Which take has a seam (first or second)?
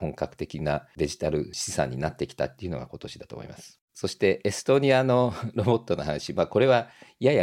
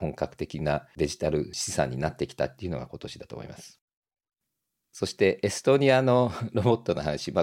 first